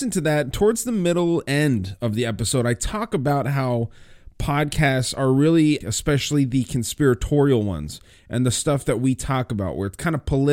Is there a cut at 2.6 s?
no; 1 cut; at 5.8 s

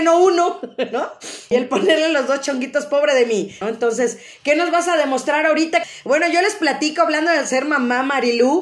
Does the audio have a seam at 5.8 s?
yes; 3 cuts; at 1.5 s, 3.6 s, 5.8 s

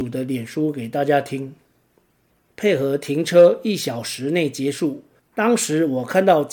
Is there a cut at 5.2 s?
yes; 2 cuts; at 2.5 s, 5.2 s

